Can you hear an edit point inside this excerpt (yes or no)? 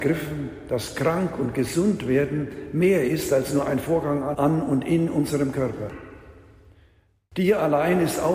no